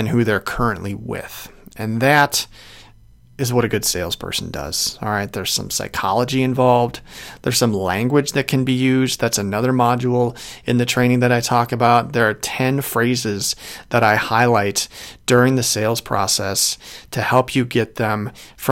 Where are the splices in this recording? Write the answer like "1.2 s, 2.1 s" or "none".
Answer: none

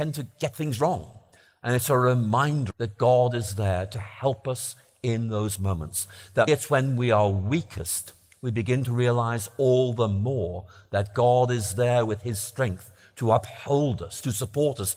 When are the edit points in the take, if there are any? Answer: 2.7 s, 6.5 s

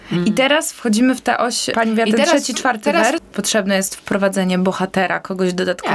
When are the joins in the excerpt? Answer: 3.2 s

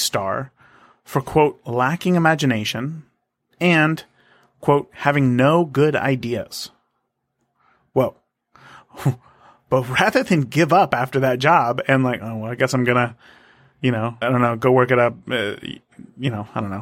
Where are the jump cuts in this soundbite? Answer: 14.2 s

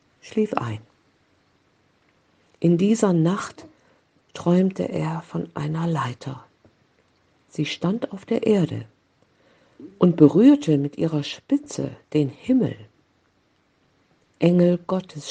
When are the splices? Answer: none

